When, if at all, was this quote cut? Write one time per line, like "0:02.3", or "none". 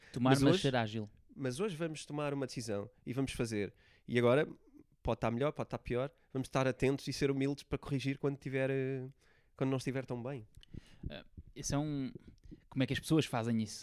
0:12.6